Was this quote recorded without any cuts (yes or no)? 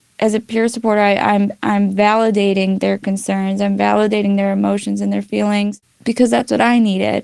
yes